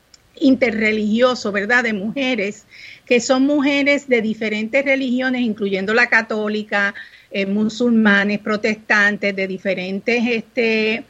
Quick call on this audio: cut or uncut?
uncut